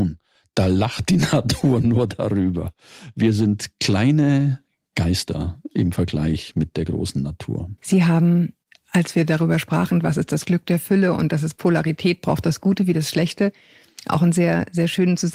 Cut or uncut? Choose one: cut